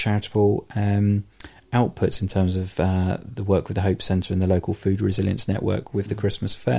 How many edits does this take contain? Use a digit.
0